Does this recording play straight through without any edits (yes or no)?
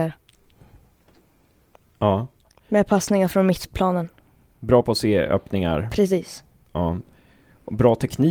yes